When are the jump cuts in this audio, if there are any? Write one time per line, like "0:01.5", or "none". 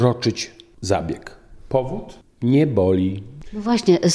none

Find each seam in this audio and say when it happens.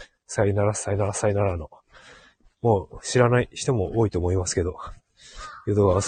none

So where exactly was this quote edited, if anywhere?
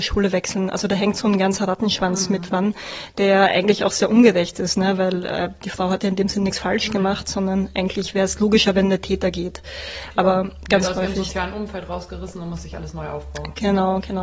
none

